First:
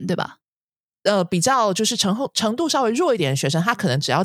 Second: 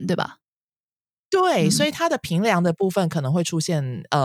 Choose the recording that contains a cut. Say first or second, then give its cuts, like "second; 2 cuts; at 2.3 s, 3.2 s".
first; 1 cut; at 0.9 s